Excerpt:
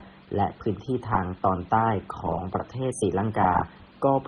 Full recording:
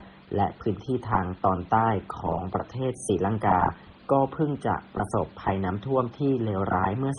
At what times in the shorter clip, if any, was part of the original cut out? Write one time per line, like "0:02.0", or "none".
0:02.9